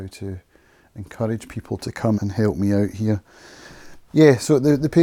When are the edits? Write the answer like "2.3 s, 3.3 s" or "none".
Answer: 2.1 s, 4.1 s